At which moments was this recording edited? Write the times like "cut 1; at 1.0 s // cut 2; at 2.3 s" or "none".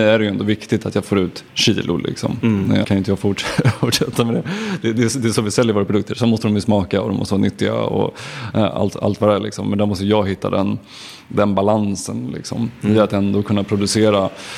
cut 1; at 2.8 s

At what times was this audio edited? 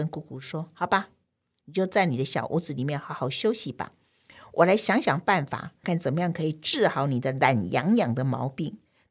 cut 1; at 1.6 s // cut 2; at 5.8 s

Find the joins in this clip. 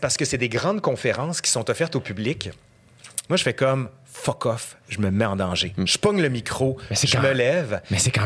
cut 1; at 3.2 s

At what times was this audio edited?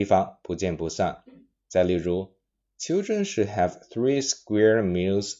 none

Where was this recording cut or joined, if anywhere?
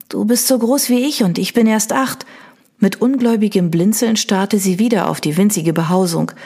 cut 1; at 2.6 s

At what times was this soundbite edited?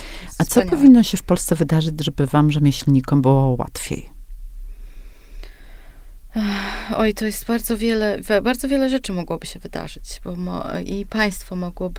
none

